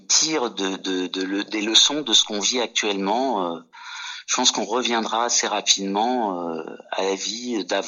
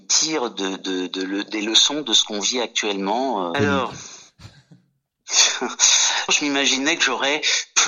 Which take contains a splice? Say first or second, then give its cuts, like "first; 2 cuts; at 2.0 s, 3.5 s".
second; 2 cuts; at 3.5 s, 6.3 s